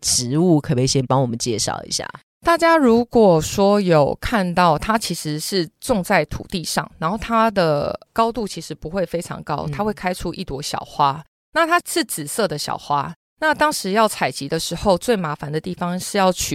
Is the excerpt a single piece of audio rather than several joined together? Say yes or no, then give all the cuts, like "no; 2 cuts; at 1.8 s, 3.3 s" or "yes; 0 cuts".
yes; 0 cuts